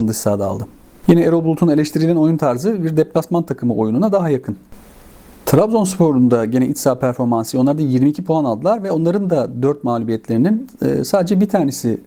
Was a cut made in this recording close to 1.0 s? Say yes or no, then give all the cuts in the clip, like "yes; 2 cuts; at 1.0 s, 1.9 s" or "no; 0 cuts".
no; 0 cuts